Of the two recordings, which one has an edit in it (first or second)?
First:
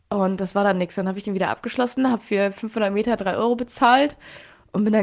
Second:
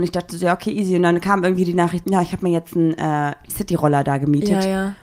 second